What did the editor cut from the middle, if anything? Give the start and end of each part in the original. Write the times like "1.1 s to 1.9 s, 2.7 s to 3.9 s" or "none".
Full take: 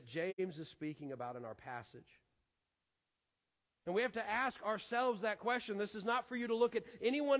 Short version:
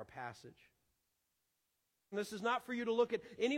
3.6 s to 5.7 s